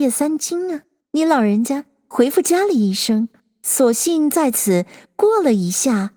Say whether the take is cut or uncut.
cut